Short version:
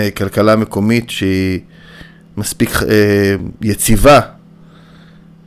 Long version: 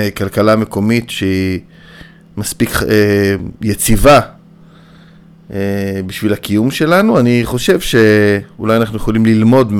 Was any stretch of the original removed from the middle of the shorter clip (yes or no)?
no